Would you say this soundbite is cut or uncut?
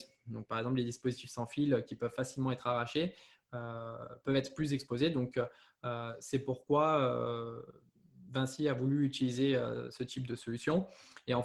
uncut